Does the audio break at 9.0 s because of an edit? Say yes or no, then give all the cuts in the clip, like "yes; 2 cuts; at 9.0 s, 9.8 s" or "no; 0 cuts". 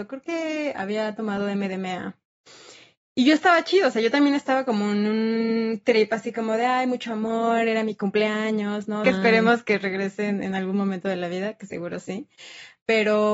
yes; 1 cut; at 9.0 s